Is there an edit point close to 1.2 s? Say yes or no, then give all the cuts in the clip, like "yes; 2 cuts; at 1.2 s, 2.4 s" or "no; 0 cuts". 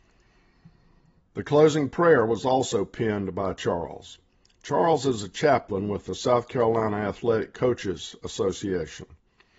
yes; 1 cut; at 1.2 s